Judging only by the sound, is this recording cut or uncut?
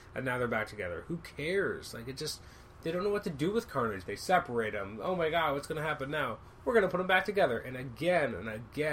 uncut